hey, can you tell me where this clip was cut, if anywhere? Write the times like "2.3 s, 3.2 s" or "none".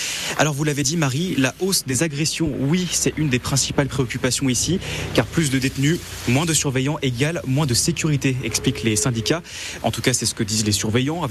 none